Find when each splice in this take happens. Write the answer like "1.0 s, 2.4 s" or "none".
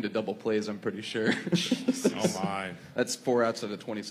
none